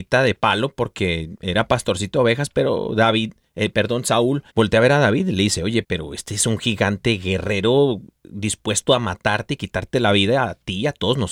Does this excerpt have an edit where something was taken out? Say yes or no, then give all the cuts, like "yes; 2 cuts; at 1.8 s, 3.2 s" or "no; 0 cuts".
yes; 2 cuts; at 4.5 s, 5.8 s